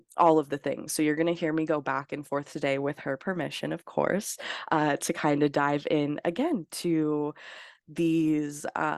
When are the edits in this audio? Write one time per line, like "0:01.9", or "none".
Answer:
none